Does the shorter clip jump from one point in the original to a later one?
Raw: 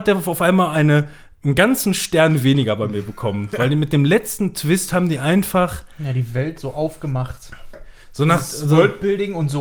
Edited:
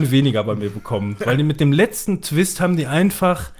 no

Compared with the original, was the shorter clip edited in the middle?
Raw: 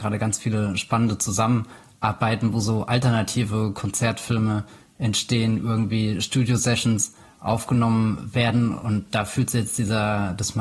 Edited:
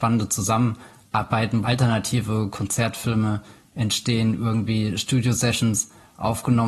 yes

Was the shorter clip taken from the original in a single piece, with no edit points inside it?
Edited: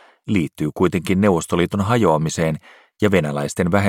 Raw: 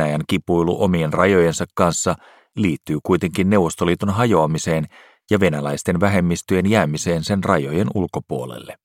yes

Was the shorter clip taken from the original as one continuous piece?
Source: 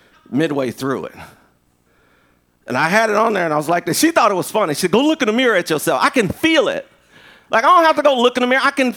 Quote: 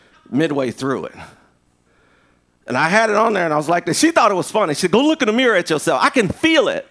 yes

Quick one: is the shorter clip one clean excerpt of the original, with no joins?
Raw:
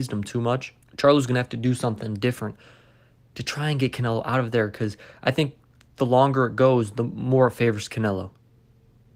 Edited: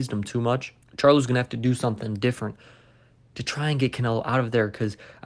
yes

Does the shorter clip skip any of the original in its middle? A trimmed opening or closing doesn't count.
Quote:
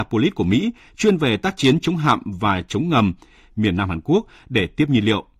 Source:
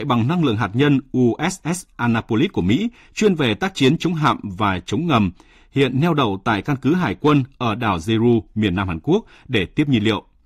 yes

